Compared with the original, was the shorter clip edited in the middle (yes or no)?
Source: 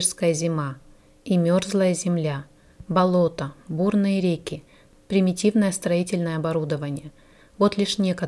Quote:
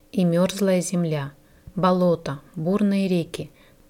no